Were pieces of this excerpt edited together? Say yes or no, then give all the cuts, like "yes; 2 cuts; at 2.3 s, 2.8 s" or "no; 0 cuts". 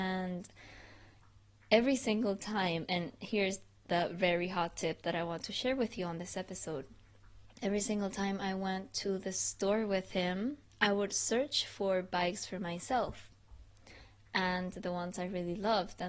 yes; 1 cut; at 7.5 s